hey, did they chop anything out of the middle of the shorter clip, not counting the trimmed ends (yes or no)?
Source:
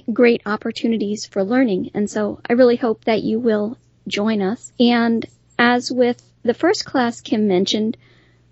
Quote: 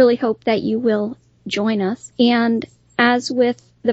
no